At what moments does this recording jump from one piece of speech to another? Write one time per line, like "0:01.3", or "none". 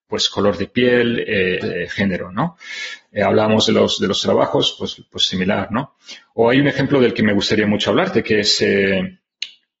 0:01.6